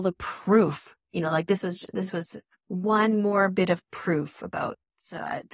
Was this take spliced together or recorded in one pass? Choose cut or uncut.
uncut